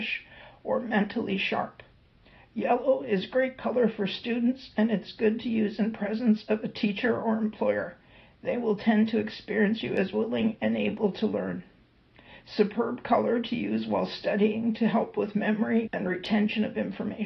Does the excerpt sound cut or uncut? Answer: cut